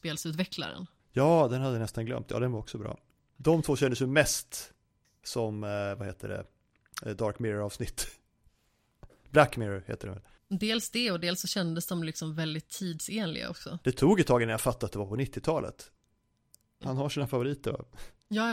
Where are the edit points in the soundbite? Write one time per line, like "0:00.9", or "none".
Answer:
0:13.8
0:16.8